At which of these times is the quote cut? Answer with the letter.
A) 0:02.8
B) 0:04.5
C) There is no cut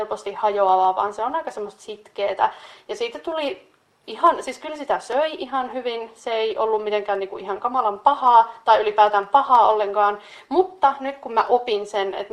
A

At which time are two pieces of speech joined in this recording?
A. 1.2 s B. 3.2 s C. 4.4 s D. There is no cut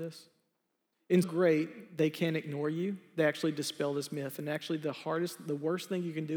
A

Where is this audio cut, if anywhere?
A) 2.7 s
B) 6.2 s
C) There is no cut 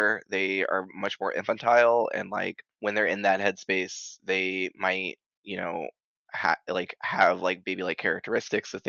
A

